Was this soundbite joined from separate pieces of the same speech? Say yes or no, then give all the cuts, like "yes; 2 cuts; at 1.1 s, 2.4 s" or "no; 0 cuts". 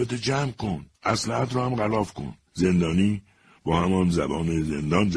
yes; 2 cuts; at 0.9 s, 2.5 s